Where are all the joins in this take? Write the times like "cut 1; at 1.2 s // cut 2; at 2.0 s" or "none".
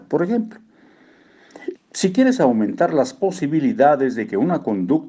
cut 1; at 1.7 s